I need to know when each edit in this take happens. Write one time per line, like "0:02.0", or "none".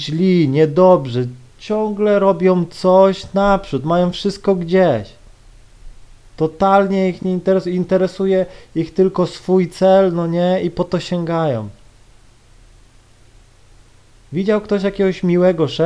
none